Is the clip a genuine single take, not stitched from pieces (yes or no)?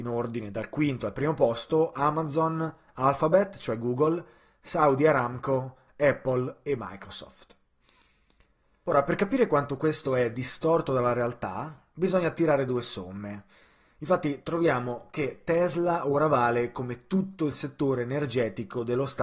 yes